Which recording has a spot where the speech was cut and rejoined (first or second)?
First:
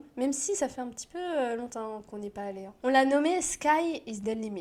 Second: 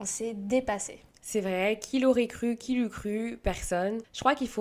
first